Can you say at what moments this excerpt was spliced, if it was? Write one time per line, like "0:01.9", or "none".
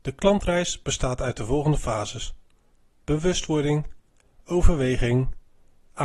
none